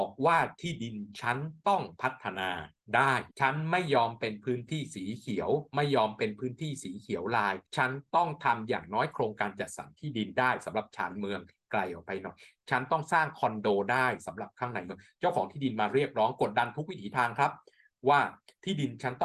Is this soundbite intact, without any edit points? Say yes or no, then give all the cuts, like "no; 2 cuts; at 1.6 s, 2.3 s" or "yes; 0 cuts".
no; 2 cuts; at 3.3 s, 7.7 s